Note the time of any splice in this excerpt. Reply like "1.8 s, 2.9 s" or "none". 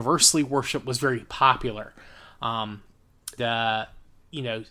3.4 s